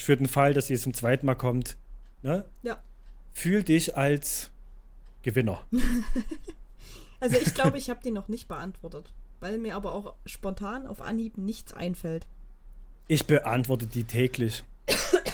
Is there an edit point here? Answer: no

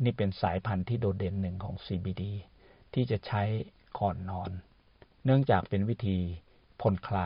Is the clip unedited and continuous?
yes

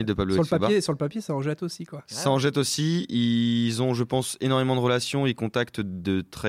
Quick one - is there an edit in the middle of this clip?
no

